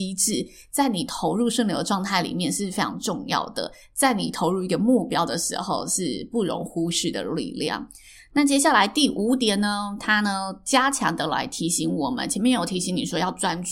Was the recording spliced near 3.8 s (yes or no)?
no